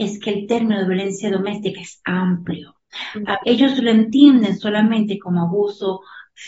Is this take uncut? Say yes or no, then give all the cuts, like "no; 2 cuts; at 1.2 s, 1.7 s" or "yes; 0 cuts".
no; 1 cut; at 3.4 s